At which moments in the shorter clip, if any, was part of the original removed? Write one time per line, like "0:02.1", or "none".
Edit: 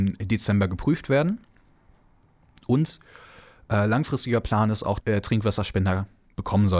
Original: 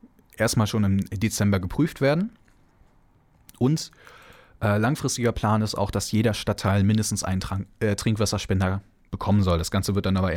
0:05.0